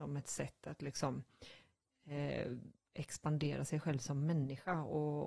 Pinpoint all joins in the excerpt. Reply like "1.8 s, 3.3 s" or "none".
none